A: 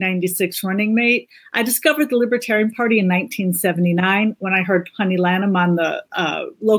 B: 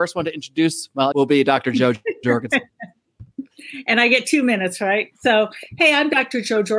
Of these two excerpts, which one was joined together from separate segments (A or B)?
B